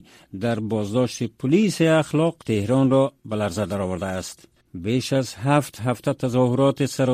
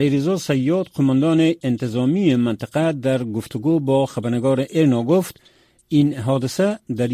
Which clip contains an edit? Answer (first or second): first